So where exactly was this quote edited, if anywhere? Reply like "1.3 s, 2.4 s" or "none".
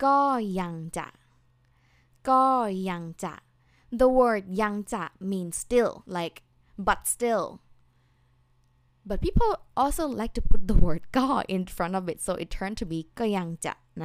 6.1 s